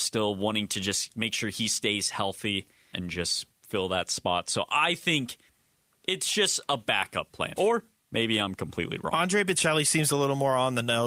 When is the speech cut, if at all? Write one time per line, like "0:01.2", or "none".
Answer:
0:02.9
0:07.6